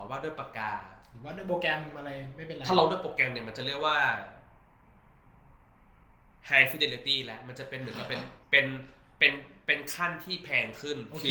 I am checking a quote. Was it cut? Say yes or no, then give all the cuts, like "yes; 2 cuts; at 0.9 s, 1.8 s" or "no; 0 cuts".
yes; 1 cut; at 8.4 s